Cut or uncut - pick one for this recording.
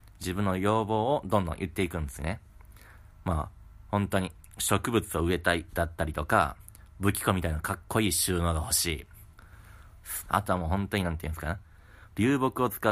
cut